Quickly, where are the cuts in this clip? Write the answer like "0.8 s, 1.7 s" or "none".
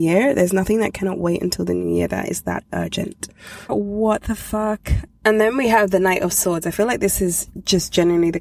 3.7 s, 5.1 s